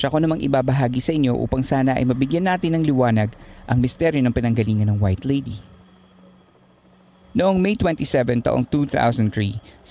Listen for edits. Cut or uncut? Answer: uncut